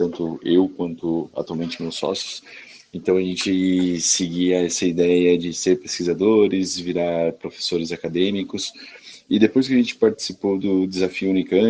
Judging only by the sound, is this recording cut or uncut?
uncut